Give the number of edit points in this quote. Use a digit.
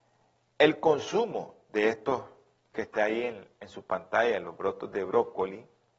0